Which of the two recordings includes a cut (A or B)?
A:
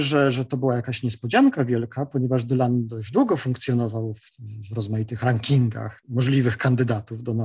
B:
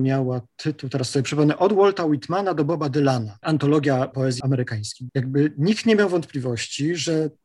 B